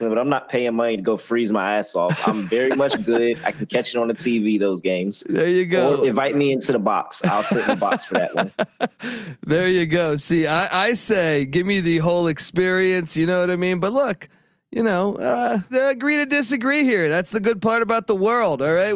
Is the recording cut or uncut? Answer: cut